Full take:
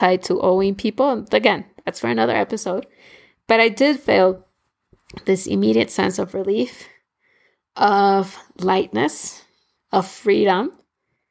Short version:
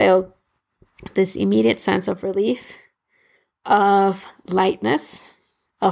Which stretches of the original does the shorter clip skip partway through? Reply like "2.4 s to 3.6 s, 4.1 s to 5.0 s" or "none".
none